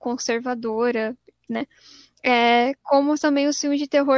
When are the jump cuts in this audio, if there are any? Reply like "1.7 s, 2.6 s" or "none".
1.5 s, 2.8 s